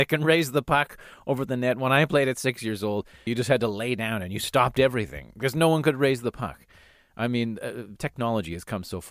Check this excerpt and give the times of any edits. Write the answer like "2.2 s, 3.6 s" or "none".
3.3 s